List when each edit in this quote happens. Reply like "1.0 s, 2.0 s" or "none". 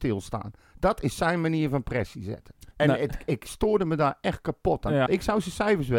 2.7 s, 5.1 s